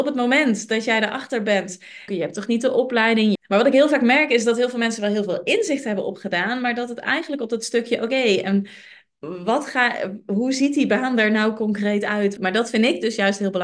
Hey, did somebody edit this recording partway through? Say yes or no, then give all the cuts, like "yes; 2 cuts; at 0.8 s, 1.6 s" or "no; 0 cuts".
yes; 3 cuts; at 2.1 s, 3.4 s, 12.4 s